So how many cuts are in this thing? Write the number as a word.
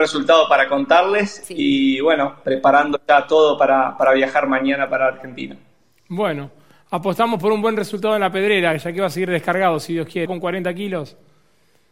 one